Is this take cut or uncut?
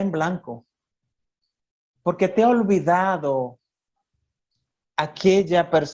uncut